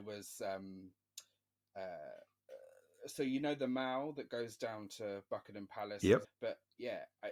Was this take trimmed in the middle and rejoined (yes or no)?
yes